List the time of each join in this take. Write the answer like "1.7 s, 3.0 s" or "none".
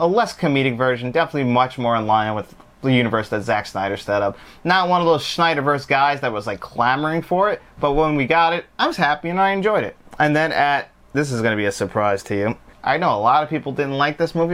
10.1 s, 12.7 s